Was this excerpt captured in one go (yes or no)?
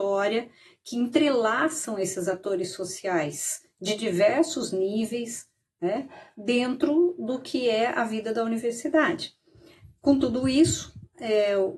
yes